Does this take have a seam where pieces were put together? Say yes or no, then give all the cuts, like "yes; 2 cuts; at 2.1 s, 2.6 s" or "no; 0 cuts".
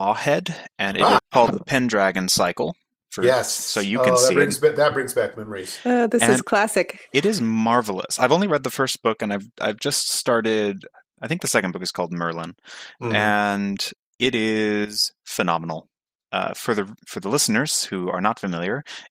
yes; 1 cut; at 1.2 s